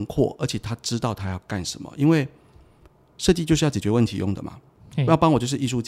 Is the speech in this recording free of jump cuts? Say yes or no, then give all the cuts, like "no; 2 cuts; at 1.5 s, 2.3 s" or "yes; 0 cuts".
yes; 0 cuts